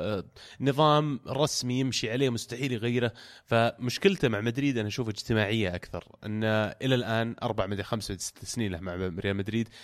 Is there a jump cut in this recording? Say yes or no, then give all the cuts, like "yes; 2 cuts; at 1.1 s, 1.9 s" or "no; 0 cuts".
no; 0 cuts